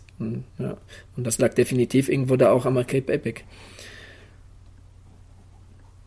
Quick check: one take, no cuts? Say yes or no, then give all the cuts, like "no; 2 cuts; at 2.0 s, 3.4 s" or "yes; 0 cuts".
yes; 0 cuts